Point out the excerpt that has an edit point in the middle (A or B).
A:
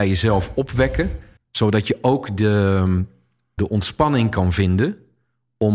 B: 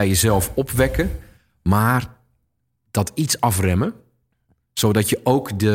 A